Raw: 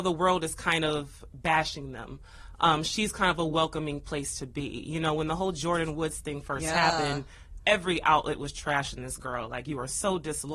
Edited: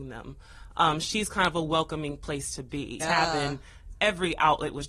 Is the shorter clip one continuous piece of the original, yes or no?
no